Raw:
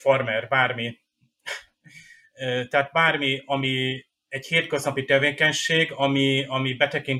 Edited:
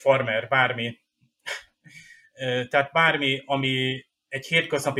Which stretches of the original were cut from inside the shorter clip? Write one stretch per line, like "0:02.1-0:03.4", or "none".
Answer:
none